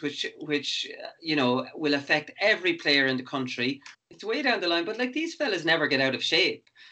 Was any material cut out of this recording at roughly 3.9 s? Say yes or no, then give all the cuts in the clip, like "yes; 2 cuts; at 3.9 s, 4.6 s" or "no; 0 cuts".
yes; 1 cut; at 3.9 s